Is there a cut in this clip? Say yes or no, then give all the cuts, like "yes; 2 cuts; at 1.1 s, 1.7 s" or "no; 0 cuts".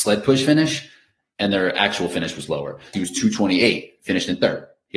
yes; 1 cut; at 2.9 s